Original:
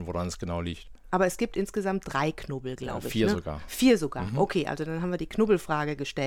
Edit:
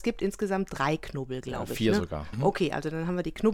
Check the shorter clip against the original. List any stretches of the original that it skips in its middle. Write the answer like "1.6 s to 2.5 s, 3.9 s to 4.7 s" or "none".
3.7 s to 4.3 s